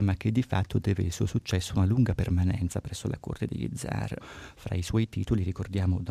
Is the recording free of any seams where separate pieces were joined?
no; 1 cut; at 4.2 s

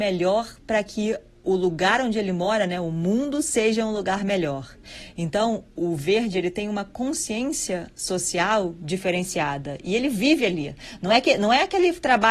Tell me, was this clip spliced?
yes; 1 cut; at 5.7 s

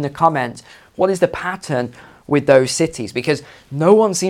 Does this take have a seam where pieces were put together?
no; 0 cuts

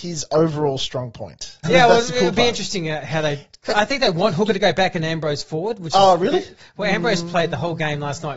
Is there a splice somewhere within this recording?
yes; 1 cut; at 1.6 s

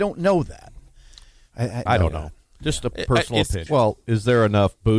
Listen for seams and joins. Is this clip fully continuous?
no; 2 cuts; at 1.9 s, 3.7 s

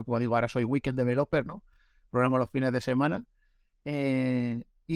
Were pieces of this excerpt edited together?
no; 0 cuts

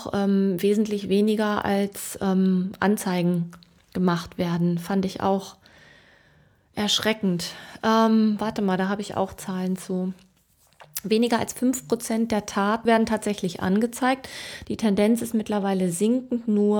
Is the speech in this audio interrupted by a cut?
yes; 2 cuts; at 12.9 s, 14.6 s

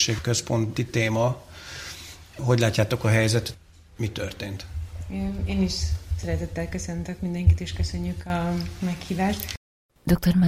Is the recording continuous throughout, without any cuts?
yes; 0 cuts

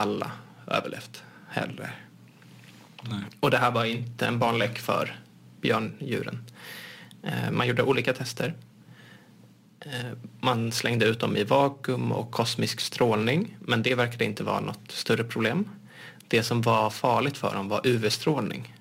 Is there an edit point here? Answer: no; 0 cuts

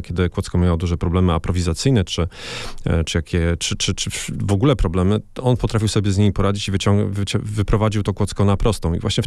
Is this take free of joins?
yes; 0 cuts

